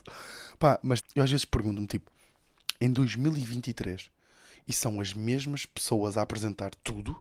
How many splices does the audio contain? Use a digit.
1